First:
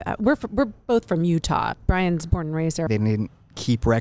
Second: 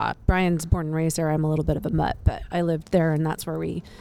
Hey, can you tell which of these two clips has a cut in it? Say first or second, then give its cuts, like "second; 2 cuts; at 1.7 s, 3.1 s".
first; 1 cut; at 2.9 s